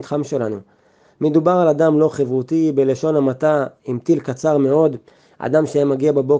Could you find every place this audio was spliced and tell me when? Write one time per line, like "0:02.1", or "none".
none